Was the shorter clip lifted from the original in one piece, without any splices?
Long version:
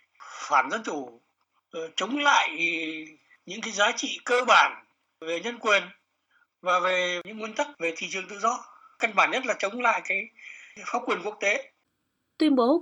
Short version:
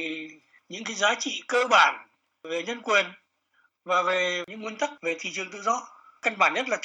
yes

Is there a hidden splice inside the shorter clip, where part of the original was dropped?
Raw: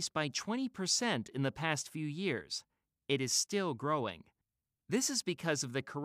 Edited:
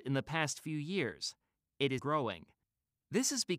yes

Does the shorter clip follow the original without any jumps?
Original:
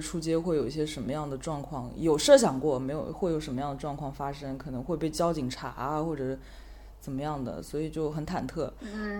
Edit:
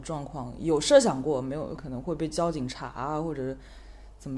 no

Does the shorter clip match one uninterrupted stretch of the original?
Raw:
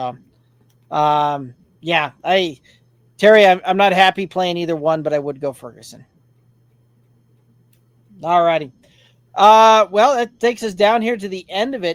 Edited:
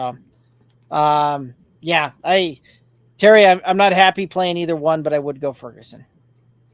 yes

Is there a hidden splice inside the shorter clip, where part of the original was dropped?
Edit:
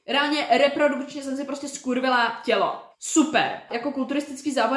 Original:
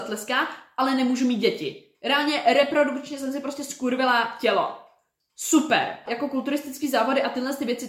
yes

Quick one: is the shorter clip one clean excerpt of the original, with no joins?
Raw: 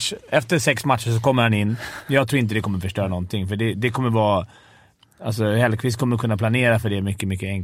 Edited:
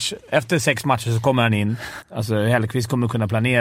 no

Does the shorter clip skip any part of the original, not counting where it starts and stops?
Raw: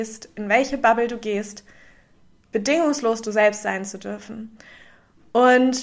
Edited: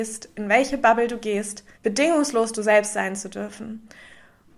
yes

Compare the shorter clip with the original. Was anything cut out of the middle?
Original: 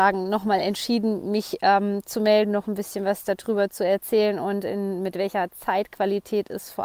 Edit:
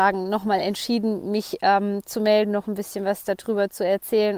no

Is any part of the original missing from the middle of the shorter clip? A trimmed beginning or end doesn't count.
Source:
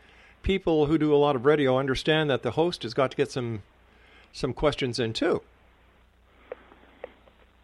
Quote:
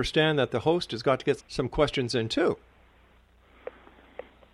yes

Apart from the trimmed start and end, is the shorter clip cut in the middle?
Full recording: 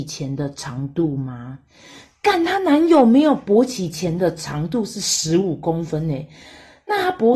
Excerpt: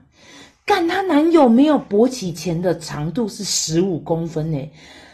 no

